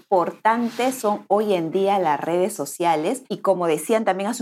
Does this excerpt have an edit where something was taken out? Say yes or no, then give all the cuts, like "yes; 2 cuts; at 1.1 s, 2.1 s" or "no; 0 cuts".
yes; 1 cut; at 3.3 s